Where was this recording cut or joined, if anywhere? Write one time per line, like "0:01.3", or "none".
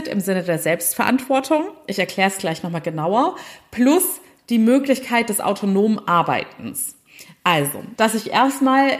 0:08.0

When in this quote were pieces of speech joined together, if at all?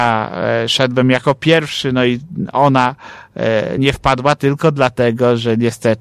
none

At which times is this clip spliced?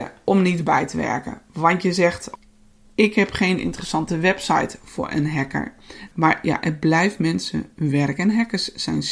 0:06.1

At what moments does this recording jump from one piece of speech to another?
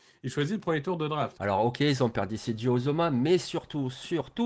0:01.4

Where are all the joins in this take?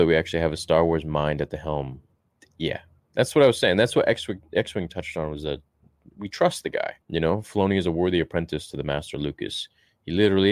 0:07.0

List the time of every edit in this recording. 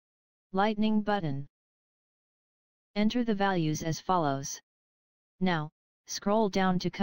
0:05.3

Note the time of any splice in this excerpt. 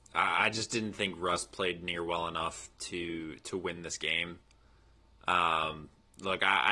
none

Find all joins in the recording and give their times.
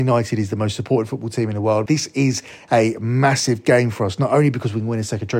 0:01.9

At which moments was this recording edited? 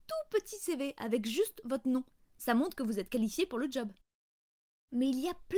none

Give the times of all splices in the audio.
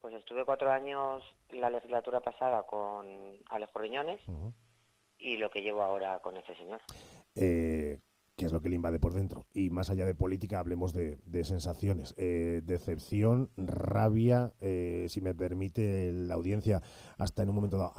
none

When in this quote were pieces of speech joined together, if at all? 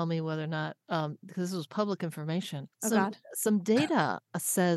0:02.7

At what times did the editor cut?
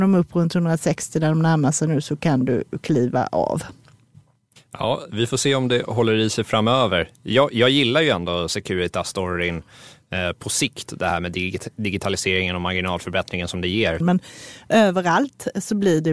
0:14.0

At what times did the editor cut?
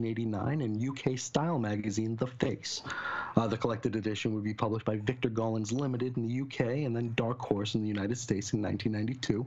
none

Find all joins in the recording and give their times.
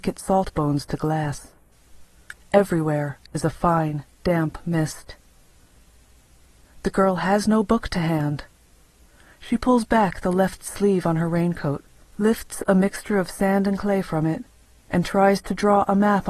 0:12.1

